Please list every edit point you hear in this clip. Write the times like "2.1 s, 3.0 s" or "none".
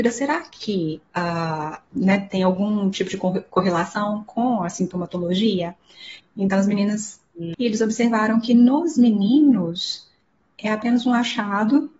1.9 s, 6.2 s, 7.5 s